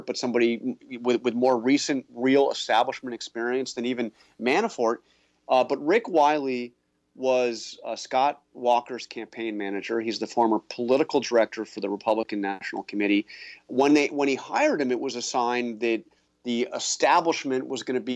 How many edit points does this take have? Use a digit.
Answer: 1